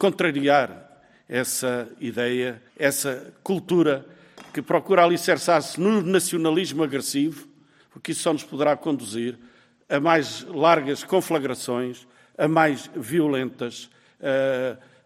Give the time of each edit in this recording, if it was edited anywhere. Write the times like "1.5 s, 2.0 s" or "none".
2.7 s, 7.8 s

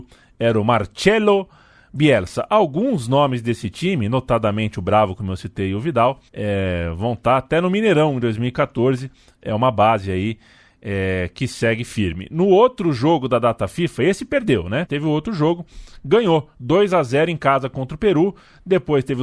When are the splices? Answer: 6.3 s, 14.9 s

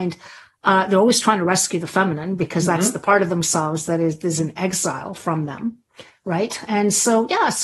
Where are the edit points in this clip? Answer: none

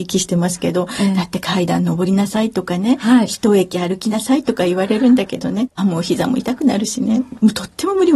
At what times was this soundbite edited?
5.8 s

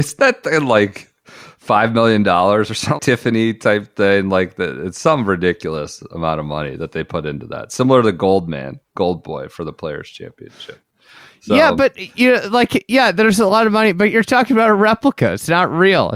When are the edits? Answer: 3.0 s

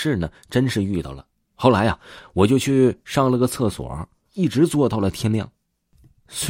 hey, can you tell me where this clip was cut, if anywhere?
1.5 s, 4.3 s

